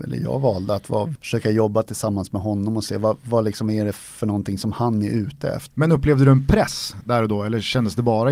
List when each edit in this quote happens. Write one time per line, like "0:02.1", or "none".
0:01.2
0:05.7